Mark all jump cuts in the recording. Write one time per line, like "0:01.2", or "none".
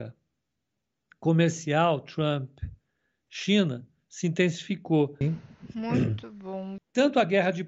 0:05.2
0:06.8